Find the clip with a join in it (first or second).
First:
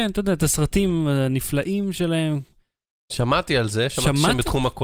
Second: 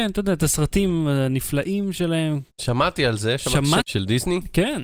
second